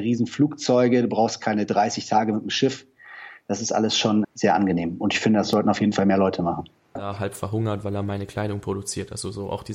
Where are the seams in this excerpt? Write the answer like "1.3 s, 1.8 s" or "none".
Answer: 4.2 s, 7.0 s